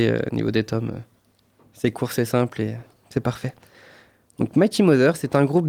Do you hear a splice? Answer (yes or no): no